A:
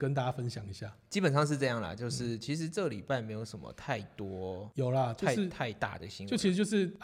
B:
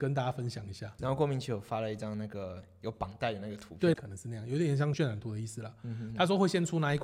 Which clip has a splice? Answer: B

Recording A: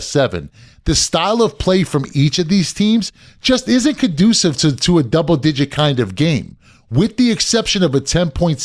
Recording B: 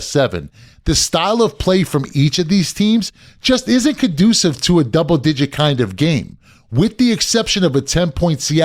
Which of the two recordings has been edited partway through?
B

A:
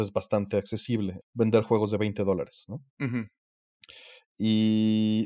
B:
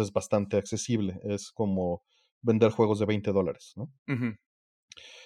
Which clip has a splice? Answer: A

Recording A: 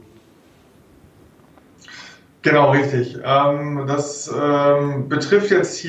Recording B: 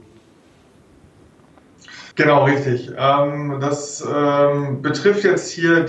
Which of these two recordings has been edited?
B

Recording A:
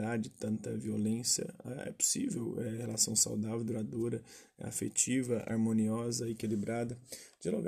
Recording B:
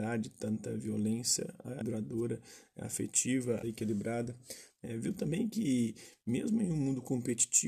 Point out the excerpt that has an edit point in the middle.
B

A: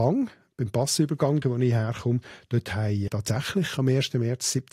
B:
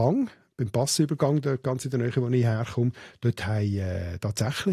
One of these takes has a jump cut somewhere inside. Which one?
A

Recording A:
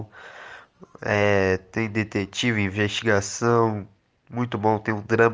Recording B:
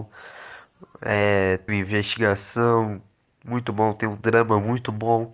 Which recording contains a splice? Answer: B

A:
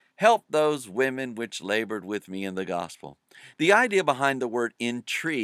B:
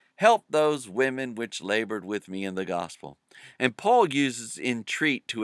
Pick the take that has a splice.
B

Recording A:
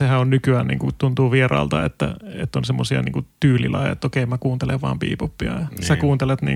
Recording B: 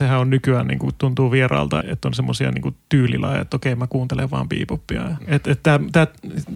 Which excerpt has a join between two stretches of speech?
B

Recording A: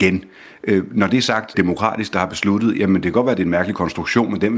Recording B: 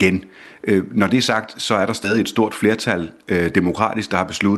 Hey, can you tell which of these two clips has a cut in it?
A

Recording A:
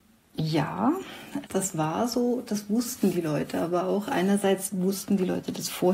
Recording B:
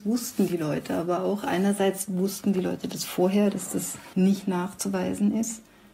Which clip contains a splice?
A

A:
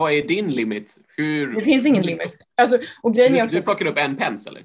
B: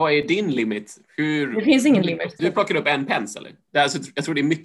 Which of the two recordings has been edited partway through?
B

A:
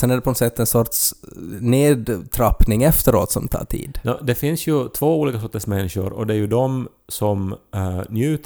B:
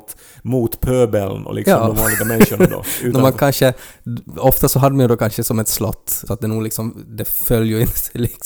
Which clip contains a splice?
B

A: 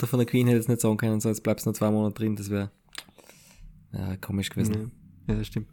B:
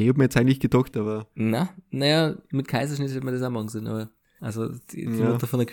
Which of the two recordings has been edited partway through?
B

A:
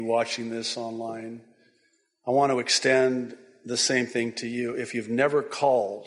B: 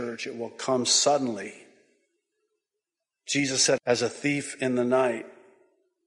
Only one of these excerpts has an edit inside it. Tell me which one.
B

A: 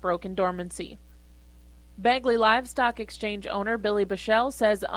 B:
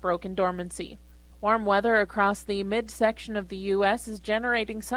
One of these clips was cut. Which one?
B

